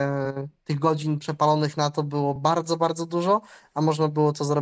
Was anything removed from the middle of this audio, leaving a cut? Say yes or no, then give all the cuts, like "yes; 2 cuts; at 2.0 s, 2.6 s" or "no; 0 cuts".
no; 0 cuts